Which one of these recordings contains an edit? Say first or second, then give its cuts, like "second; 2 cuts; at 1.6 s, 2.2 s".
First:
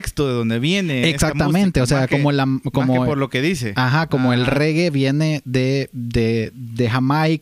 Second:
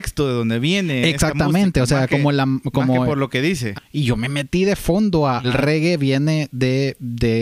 second; 2 cuts; at 3.7 s, 5.4 s